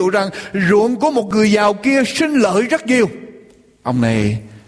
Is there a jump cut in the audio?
no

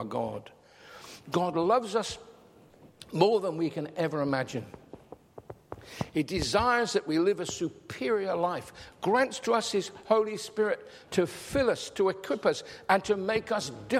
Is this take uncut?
yes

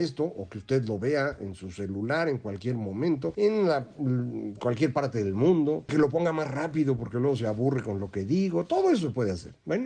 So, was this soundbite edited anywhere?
yes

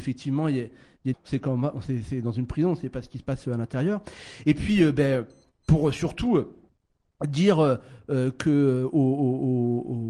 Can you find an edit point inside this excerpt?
yes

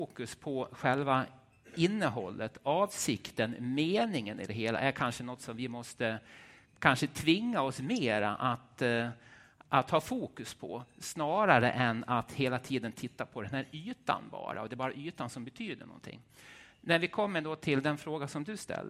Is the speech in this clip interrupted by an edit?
no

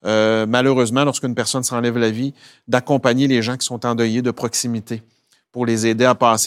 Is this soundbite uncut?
yes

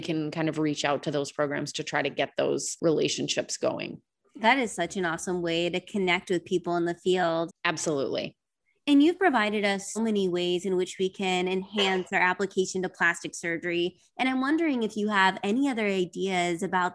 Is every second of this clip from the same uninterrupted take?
no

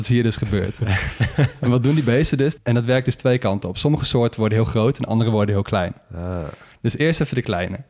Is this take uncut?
no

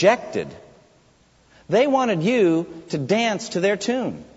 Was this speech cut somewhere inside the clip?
no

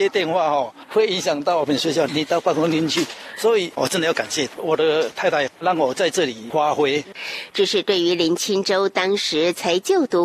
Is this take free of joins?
no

